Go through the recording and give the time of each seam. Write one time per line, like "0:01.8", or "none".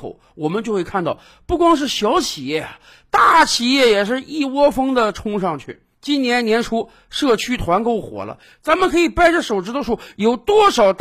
0:09.8